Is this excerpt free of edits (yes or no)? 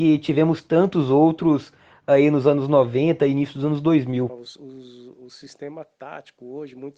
no